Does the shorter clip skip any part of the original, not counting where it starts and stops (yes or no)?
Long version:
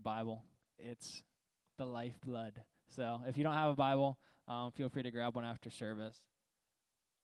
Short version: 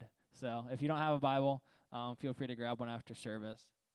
no